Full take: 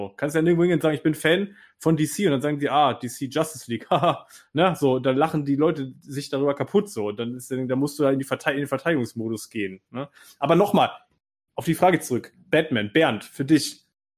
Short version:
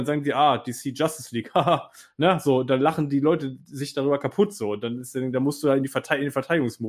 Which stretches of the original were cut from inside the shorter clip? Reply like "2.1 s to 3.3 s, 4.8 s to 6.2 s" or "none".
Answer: none